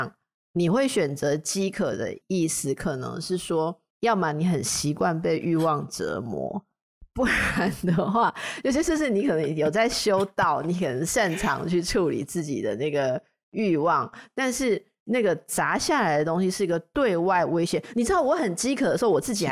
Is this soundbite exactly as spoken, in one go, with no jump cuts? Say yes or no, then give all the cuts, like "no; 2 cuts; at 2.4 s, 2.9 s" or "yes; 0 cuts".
yes; 0 cuts